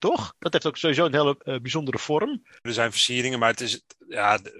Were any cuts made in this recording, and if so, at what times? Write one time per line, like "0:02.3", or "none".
0:02.7